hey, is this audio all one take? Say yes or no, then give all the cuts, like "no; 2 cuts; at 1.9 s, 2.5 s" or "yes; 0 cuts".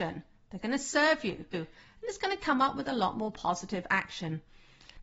no; 1 cut; at 1.5 s